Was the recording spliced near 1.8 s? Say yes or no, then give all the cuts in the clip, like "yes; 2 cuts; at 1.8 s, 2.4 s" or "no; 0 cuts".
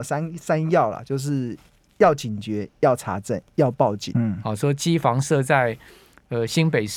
no; 1 cut; at 4.1 s